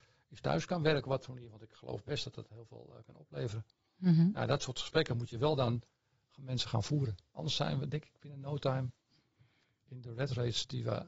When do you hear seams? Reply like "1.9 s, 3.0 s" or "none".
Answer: none